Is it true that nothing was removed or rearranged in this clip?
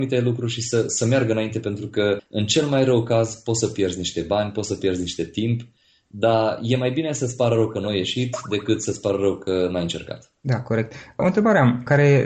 yes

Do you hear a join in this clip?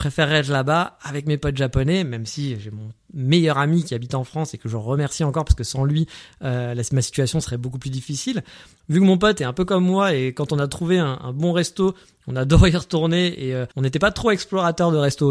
yes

